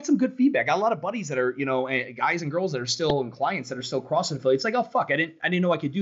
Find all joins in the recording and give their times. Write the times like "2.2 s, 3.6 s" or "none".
none

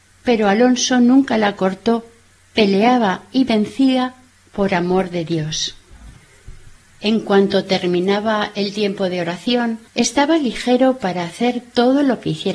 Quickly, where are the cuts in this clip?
9.9 s

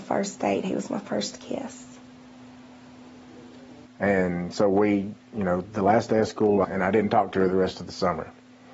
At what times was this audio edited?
3.9 s, 6.6 s

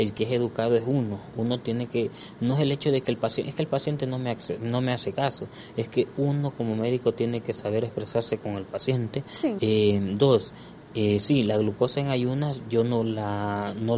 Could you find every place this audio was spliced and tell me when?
9.6 s

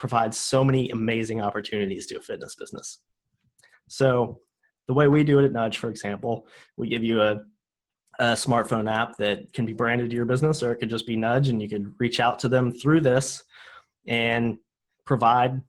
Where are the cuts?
none

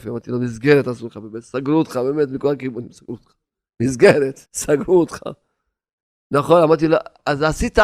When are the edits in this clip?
4.5 s

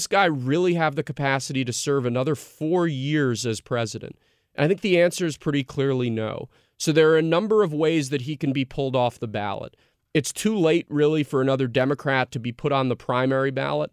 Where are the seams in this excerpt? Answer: none

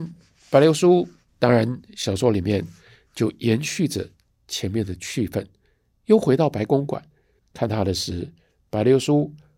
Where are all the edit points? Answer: 1.3 s, 7.4 s

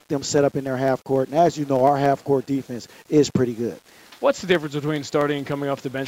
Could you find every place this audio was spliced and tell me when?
none

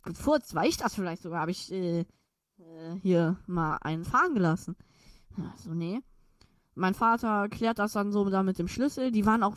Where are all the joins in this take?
none

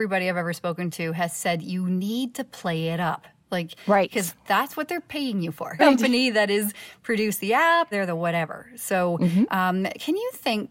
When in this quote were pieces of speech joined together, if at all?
5.8 s, 7.9 s

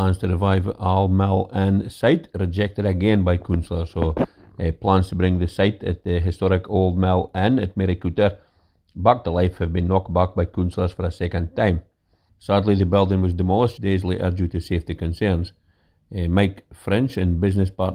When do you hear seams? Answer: 12.3 s, 13.8 s

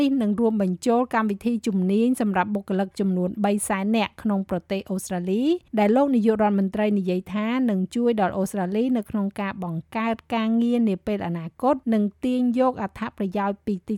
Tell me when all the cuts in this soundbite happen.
5.7 s, 11.8 s

